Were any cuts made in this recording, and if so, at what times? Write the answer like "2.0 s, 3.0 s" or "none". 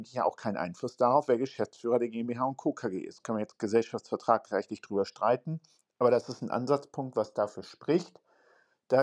none